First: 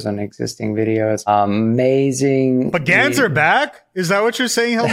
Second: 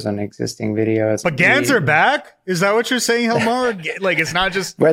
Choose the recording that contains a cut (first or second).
second